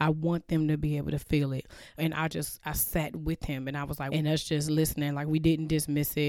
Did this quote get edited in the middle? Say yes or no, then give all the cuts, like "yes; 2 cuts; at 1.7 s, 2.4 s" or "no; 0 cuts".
yes; 2 cuts; at 2.0 s, 4.1 s